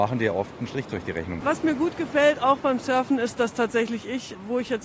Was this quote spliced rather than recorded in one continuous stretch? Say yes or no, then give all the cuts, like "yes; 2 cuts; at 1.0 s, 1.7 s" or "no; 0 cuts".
yes; 1 cut; at 1.4 s